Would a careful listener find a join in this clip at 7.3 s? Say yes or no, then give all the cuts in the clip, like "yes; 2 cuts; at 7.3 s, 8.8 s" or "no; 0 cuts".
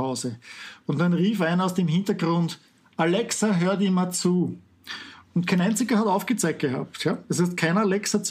no; 0 cuts